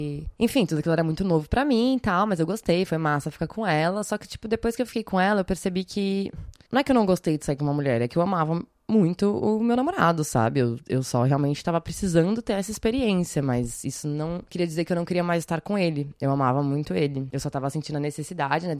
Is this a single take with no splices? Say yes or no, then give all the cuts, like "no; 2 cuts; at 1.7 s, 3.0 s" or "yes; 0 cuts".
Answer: yes; 0 cuts